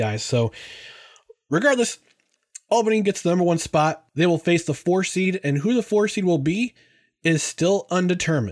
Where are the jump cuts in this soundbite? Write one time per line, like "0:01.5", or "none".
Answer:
0:04.1